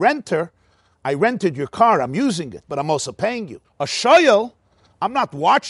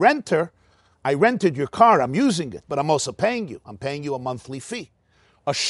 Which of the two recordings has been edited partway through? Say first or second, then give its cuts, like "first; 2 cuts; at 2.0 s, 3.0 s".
first; 1 cut; at 3.6 s